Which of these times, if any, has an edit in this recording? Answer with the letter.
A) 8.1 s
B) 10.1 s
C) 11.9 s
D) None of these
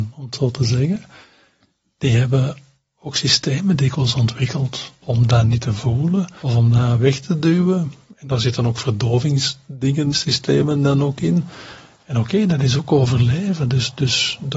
B